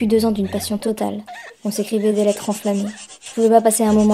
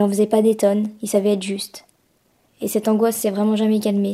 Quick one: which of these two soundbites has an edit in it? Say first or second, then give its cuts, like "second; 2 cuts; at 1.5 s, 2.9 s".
second; 1 cut; at 2.5 s